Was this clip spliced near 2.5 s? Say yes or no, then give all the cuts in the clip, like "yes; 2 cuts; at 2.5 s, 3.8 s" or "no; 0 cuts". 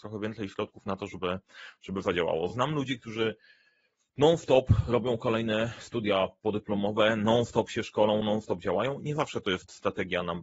no; 0 cuts